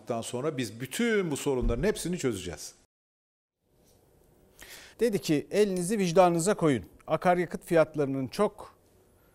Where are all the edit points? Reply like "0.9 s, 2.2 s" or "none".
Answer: 4.9 s